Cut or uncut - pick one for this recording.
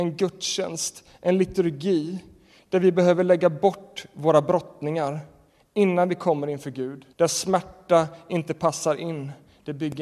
cut